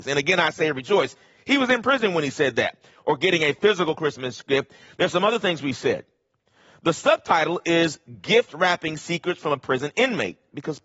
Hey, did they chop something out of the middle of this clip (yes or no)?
yes